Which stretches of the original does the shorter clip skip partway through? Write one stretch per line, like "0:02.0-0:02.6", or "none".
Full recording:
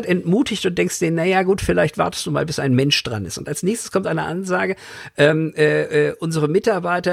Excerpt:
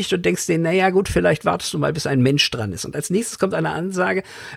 none